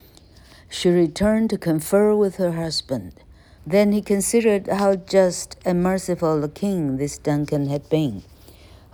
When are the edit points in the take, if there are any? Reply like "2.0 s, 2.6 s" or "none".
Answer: 3.6 s